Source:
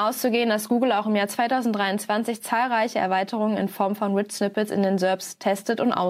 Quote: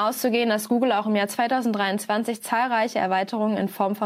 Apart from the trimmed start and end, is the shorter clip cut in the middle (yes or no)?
no